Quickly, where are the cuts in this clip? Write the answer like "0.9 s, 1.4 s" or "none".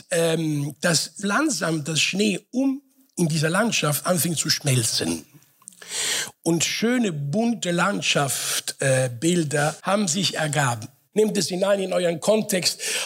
1.2 s, 9.8 s, 11.1 s